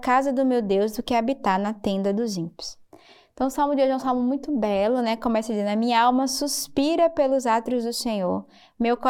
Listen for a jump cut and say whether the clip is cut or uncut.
uncut